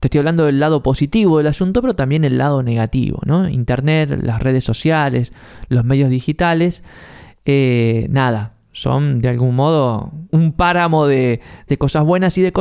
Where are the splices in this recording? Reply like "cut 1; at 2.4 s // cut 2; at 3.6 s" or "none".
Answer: cut 1; at 10.3 s // cut 2; at 11.7 s

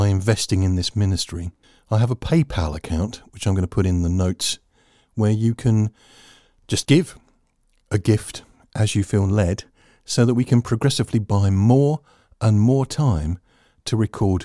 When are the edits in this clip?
none

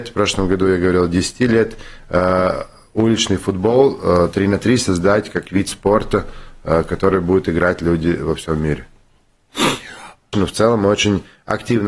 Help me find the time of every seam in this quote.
cut 1; at 10.3 s

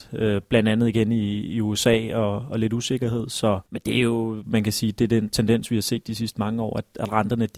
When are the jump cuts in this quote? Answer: cut 1; at 3.7 s

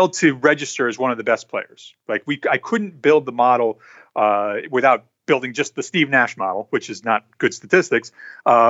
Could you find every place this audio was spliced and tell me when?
none

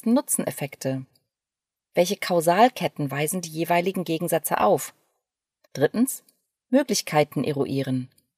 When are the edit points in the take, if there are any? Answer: cut 1; at 5.7 s

